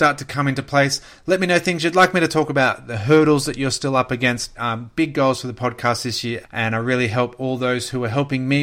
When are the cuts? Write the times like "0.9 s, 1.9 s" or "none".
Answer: 4.5 s, 6.4 s